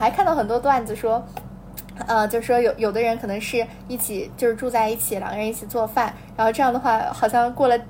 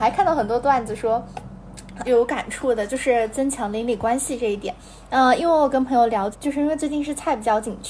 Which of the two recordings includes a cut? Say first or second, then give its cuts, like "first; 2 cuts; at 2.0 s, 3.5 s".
second; 2 cuts; at 2.0 s, 6.3 s